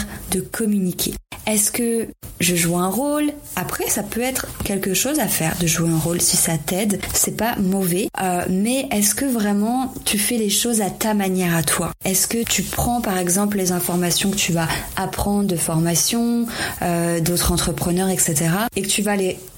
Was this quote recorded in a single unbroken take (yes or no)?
yes